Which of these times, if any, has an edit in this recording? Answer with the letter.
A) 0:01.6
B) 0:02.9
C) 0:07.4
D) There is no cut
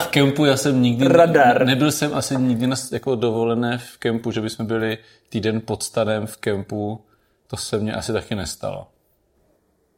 D